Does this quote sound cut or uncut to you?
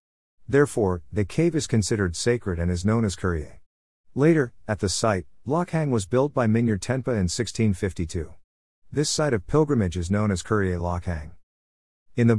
uncut